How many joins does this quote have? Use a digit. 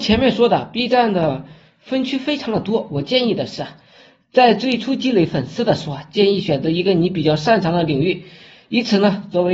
0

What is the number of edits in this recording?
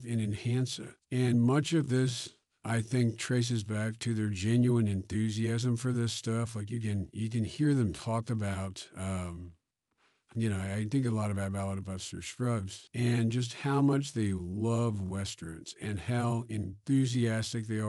0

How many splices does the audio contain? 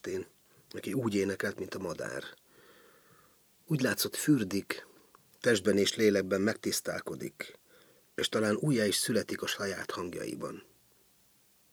0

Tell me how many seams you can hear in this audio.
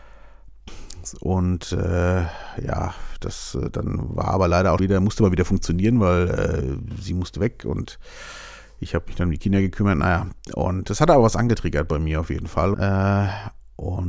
2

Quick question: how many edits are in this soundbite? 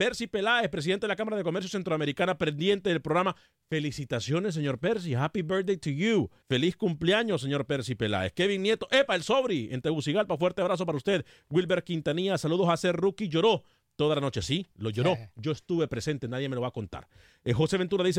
1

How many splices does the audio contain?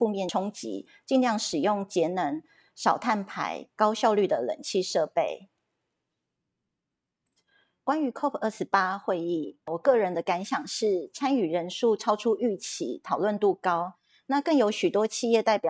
0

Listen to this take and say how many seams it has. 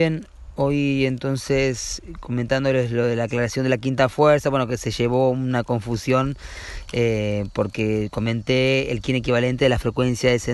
0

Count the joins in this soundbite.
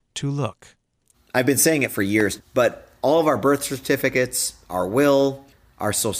2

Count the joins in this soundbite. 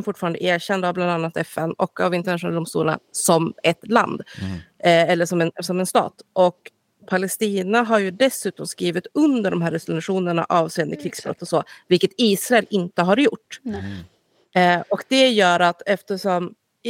0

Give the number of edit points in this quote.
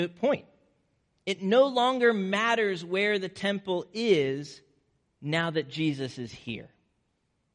0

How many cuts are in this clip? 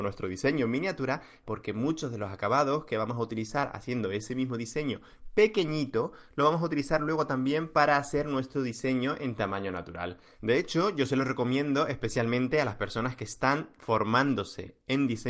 2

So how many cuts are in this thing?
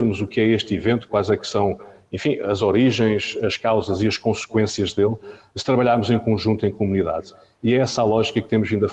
0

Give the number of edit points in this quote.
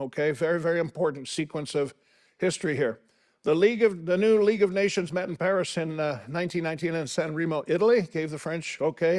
0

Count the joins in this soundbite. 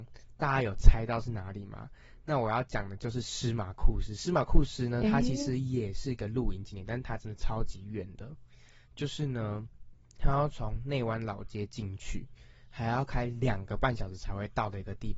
1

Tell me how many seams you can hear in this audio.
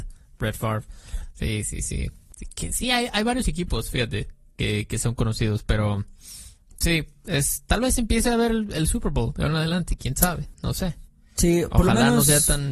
0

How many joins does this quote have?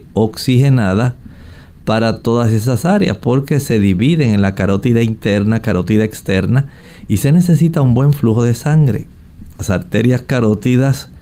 1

